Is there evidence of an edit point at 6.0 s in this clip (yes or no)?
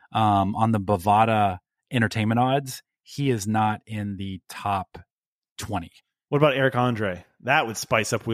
no